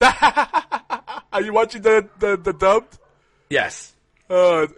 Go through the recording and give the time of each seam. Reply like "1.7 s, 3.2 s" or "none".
none